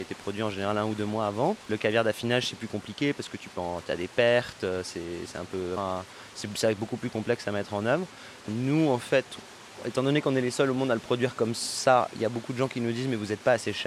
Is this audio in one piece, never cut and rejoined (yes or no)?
no